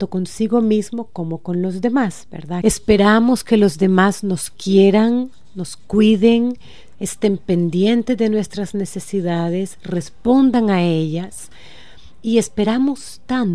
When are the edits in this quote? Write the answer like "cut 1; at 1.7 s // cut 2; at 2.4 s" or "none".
cut 1; at 2.6 s // cut 2; at 6.9 s